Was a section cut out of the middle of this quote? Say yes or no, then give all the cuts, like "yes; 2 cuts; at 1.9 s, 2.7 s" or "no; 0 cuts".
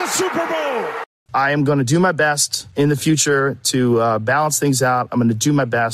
yes; 1 cut; at 1.3 s